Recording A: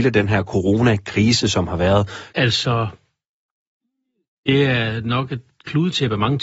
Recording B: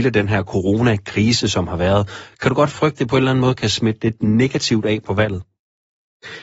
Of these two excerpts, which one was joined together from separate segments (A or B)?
A